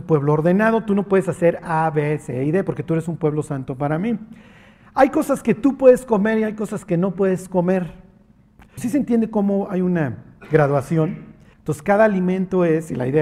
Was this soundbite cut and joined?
yes; 2 cuts; at 8.8 s, 11.5 s

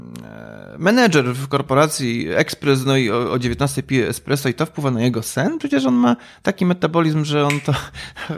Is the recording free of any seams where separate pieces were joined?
yes; 0 cuts

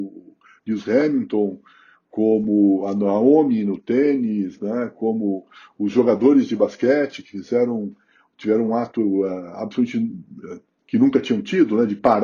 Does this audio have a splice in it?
no; 0 cuts

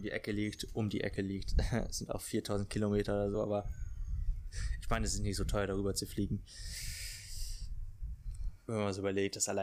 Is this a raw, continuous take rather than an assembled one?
yes; 0 cuts

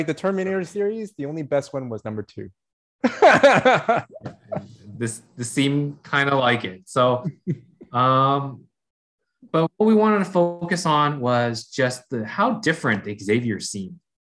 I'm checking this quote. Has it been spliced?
no; 0 cuts

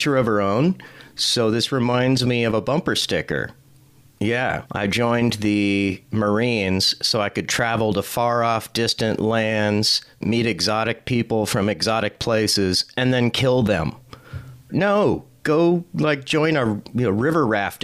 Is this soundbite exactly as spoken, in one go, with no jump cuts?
no; 2 cuts; at 4.7 s, 14.7 s

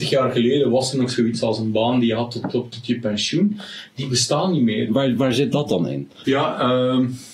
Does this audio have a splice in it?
yes; 2 cuts; at 4.9 s, 6.2 s

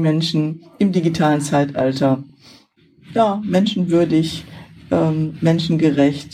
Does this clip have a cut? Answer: no; 0 cuts

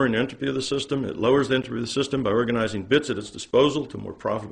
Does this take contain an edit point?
no; 0 cuts

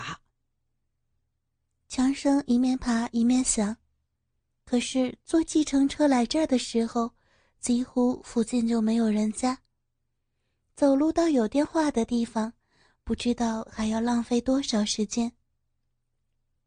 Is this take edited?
no; 0 cuts

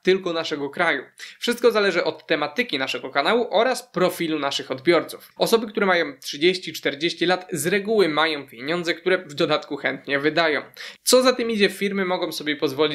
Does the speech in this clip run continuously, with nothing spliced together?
no; 2 cuts; at 5.4 s, 11.0 s

